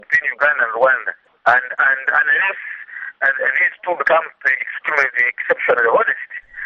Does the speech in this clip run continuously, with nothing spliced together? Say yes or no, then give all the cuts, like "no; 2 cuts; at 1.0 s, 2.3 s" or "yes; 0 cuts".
no; 1 cut; at 3.2 s